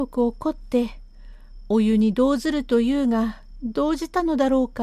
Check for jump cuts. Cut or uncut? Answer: uncut